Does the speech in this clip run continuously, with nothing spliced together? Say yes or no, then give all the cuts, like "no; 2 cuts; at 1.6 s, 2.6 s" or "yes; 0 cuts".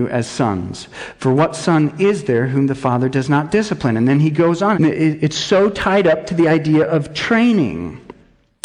no; 1 cut; at 4.7 s